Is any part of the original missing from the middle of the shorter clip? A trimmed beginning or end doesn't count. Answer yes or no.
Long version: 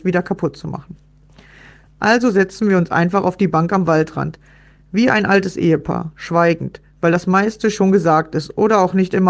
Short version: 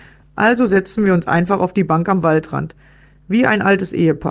no